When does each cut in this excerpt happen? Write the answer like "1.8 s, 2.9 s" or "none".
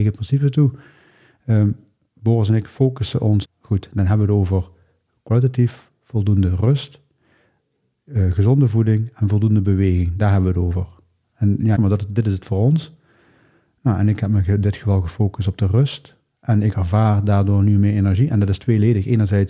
3.4 s, 11.8 s